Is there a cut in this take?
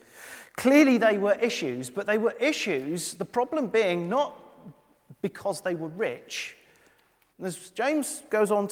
yes; 1 cut; at 7.3 s

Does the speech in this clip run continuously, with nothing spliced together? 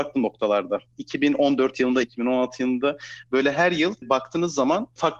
no; 1 cut; at 2.0 s

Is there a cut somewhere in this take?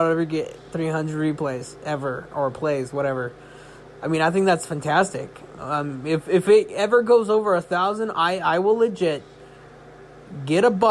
no; 0 cuts

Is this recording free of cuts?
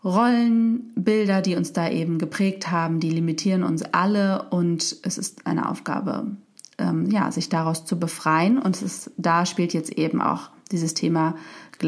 yes; 0 cuts

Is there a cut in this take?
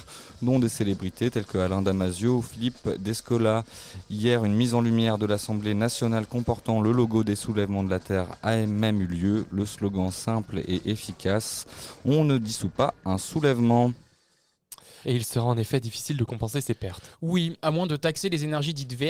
yes; 1 cut; at 15.0 s

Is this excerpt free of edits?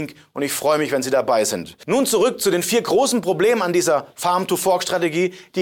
yes; 0 cuts

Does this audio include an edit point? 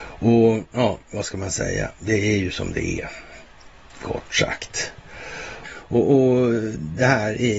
yes; 1 cut; at 5.6 s

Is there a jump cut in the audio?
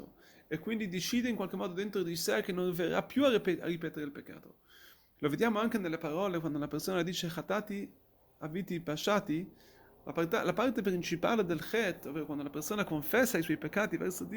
yes; 1 cut; at 5.2 s

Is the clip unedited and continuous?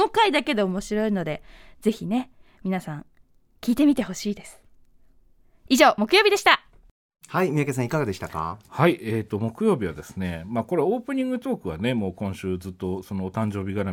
yes; 0 cuts

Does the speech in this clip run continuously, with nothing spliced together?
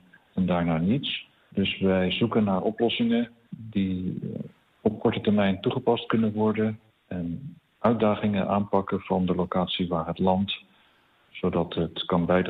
yes; 0 cuts

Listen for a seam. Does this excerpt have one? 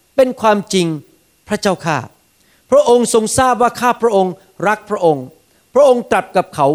no; 0 cuts

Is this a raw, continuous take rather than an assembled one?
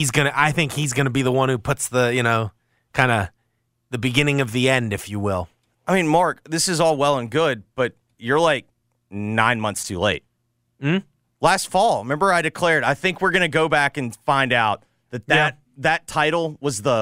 yes; 0 cuts

